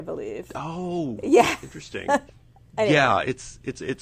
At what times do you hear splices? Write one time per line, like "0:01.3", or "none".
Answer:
0:02.3